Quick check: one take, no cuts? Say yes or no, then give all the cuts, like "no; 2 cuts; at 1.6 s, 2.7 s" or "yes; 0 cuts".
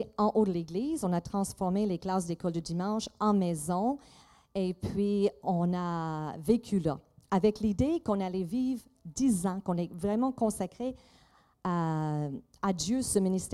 yes; 0 cuts